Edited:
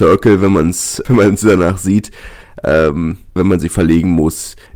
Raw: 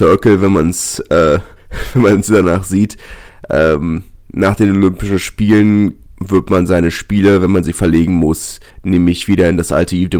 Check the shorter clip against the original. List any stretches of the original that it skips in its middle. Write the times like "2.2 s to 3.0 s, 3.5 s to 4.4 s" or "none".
1.1 s to 1.9 s, 4.2 s to 7.4 s